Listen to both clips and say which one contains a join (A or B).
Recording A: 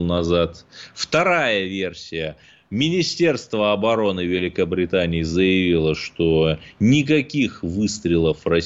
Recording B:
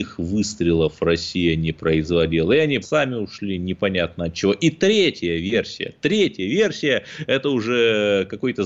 B